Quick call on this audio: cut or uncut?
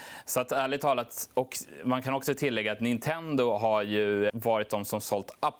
cut